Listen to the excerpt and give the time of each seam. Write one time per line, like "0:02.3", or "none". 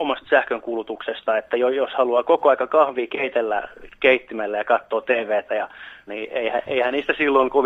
0:06.1